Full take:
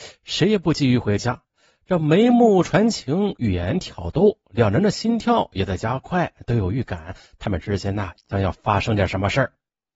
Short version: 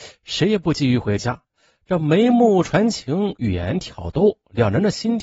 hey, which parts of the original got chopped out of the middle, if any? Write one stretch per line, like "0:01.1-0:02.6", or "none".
none